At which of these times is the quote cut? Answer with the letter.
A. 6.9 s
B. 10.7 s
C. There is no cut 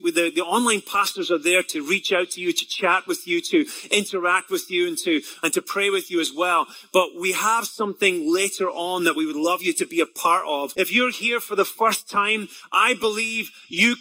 B